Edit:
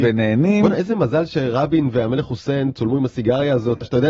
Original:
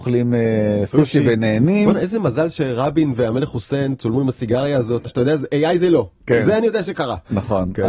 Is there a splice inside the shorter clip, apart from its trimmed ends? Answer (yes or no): no